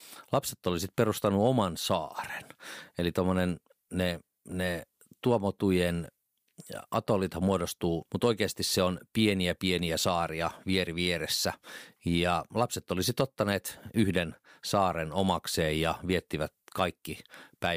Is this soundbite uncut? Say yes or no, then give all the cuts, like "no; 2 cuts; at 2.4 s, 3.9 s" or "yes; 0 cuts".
no; 1 cut; at 8.1 s